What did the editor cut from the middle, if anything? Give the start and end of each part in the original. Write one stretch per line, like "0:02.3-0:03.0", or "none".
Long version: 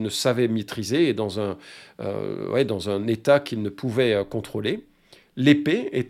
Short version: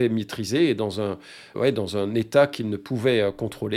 0:01.9-0:02.5